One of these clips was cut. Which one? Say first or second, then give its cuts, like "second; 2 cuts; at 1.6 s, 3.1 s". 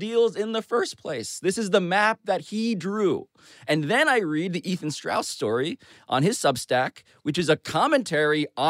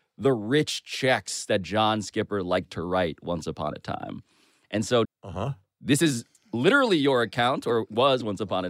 second; 1 cut; at 5.0 s